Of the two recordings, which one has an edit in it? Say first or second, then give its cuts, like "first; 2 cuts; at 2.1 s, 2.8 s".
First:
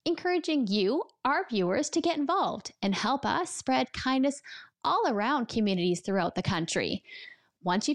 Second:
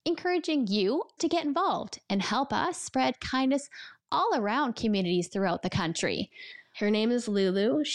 second; 2 cuts; at 1.2 s, 6.7 s